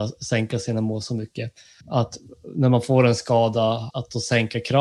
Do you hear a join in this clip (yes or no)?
yes